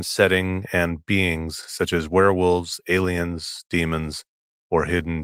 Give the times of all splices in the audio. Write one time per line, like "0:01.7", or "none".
none